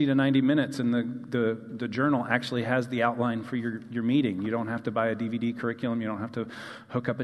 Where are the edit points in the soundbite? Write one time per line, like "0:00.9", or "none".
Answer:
none